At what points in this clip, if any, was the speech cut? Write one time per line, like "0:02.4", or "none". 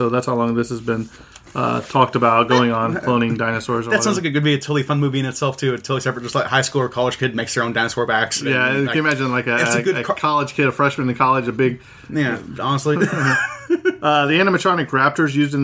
0:12.6